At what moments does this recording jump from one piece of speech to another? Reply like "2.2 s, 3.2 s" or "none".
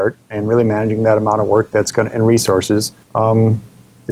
3.0 s